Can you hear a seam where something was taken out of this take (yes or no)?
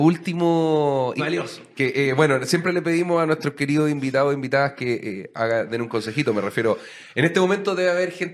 yes